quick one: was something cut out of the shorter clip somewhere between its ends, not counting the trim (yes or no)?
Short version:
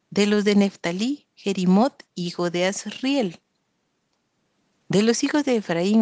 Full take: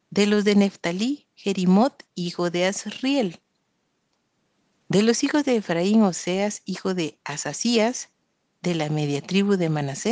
no